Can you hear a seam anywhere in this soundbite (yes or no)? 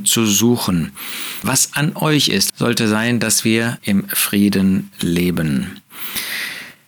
yes